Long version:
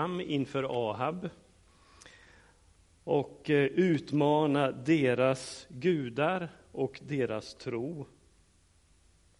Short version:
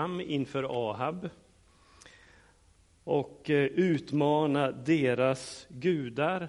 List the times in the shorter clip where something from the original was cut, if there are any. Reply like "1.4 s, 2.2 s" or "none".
none